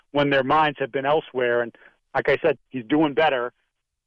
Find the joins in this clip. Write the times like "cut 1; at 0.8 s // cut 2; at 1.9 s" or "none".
cut 1; at 2.6 s